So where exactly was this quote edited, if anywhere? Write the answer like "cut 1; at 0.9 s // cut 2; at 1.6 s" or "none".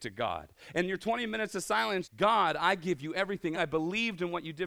cut 1; at 2.0 s // cut 2; at 3.5 s